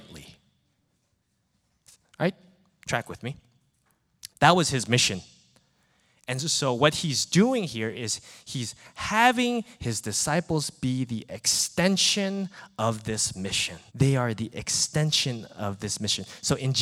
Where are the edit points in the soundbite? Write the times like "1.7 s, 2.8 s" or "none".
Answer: 4.3 s, 13.9 s